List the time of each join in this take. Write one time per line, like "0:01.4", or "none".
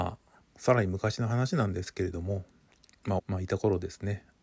0:03.2